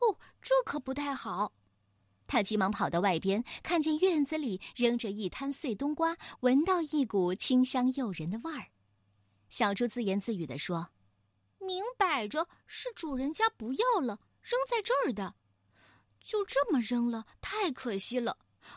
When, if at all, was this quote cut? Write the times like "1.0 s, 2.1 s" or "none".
2.0 s